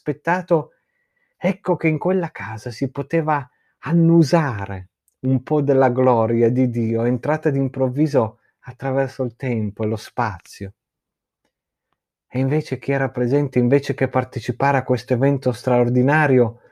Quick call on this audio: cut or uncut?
uncut